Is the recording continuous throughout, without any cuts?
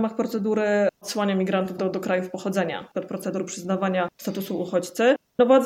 no; 2 cuts; at 1.8 s, 2.9 s

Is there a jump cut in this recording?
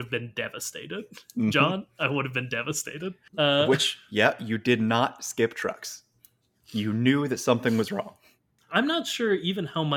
no; 0 cuts

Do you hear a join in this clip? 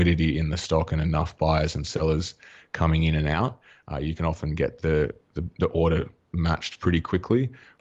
no; 0 cuts

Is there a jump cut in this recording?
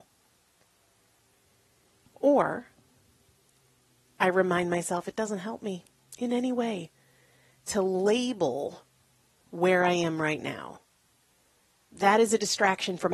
no; 0 cuts

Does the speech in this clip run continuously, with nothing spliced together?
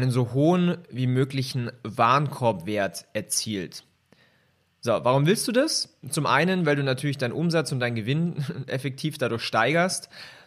yes; 0 cuts

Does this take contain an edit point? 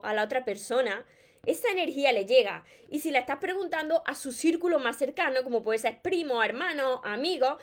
no; 0 cuts

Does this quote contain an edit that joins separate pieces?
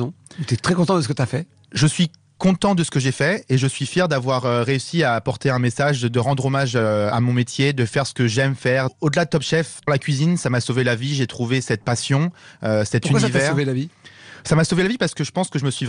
yes; 1 cut; at 7.1 s

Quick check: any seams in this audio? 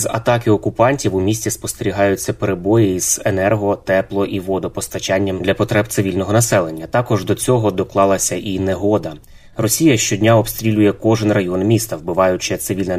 no; 0 cuts

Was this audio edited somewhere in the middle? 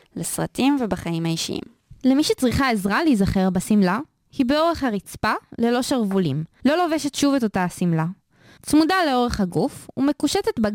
yes; 2 cuts; at 6.6 s, 8.6 s

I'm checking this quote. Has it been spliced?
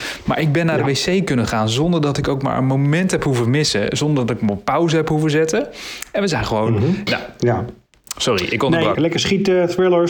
yes; 2 cuts; at 7.1 s, 8.9 s

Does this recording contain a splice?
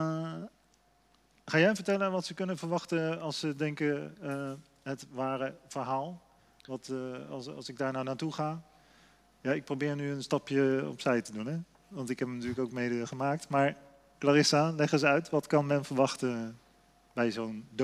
no; 0 cuts

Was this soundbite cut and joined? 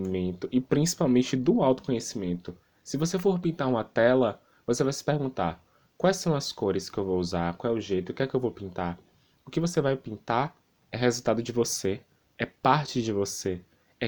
no; 0 cuts

